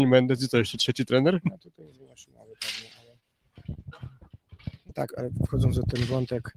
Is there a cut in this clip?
yes; 2 cuts; at 1.4 s, 5.1 s

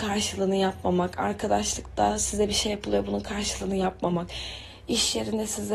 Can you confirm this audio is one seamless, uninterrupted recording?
yes; 0 cuts

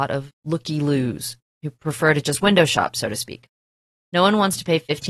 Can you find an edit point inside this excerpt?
no; 0 cuts

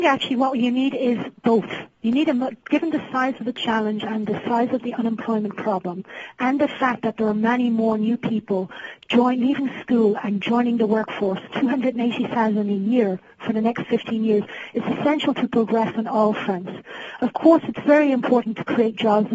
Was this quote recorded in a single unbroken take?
no; 1 cut; at 1.9 s

